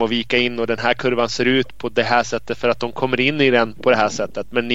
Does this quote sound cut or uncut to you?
uncut